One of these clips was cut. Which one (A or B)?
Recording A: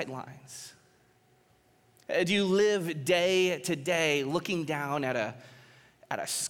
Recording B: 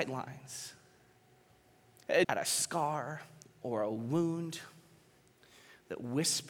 B